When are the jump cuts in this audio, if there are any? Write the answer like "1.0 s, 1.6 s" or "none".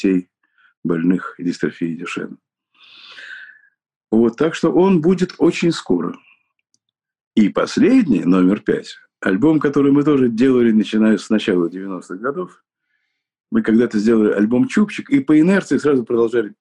none